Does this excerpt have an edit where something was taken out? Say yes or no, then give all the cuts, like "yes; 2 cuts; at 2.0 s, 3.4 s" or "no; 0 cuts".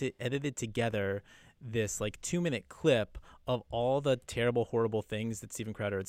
no; 0 cuts